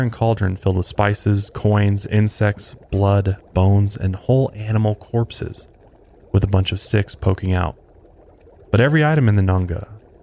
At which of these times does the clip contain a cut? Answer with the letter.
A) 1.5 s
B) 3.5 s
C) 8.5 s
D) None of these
D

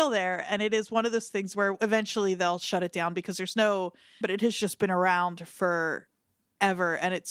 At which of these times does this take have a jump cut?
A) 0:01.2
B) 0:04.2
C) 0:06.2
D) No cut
B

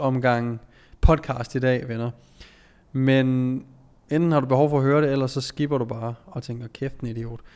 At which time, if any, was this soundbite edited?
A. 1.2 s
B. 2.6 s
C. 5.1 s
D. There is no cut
D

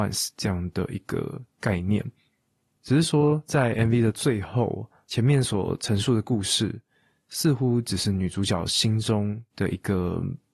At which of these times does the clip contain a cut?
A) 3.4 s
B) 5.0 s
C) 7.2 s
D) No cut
D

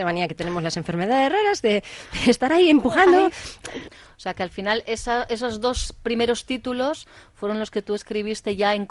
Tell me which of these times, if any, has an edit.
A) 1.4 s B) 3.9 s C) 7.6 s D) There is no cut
B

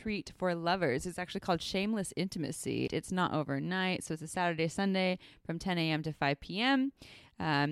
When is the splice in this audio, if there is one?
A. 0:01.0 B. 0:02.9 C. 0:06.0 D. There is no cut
B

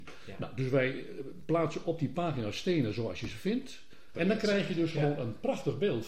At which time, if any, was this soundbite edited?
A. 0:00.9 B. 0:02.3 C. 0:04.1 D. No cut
C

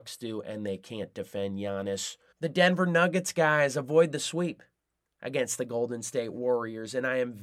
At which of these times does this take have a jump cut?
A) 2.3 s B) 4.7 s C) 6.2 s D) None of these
A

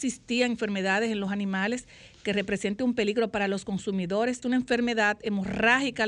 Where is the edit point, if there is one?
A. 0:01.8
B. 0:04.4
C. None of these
B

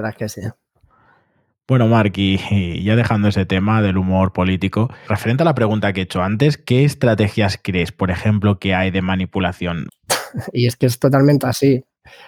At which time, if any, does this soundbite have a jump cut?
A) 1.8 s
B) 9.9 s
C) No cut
B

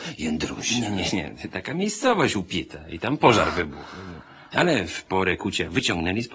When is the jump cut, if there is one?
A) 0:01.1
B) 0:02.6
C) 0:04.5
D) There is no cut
C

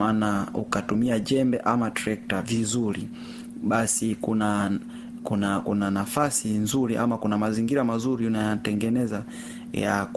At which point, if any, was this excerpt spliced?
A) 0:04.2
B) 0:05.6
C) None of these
B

